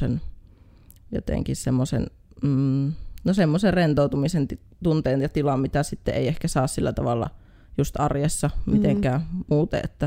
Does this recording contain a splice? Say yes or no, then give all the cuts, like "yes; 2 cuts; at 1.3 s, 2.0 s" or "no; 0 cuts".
no; 0 cuts